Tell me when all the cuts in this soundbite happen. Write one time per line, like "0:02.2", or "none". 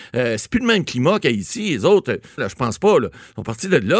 0:02.4